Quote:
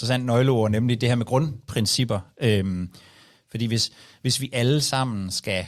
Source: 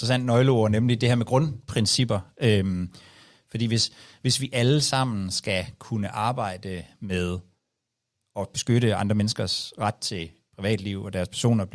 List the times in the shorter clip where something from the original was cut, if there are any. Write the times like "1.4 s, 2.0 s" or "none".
none